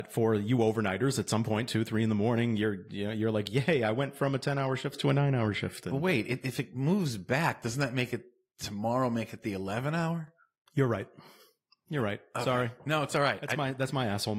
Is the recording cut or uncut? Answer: uncut